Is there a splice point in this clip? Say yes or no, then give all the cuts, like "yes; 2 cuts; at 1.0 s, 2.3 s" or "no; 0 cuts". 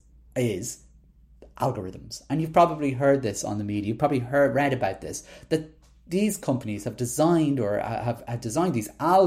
no; 0 cuts